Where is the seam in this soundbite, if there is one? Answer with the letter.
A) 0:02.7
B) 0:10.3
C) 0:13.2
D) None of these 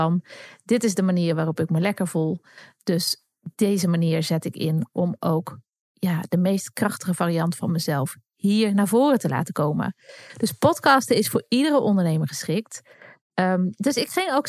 D